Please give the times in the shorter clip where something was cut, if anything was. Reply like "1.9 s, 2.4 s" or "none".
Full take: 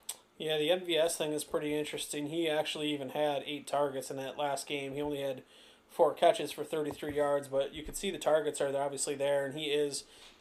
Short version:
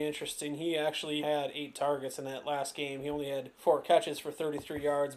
1.2 s, 3.5 s